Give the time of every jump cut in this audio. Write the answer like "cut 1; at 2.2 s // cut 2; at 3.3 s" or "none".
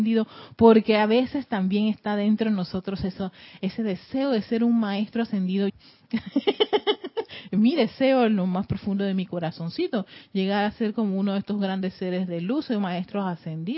cut 1; at 5.7 s